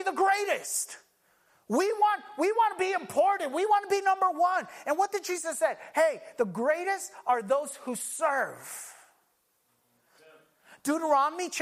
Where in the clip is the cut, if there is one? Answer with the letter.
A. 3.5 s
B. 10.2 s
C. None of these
B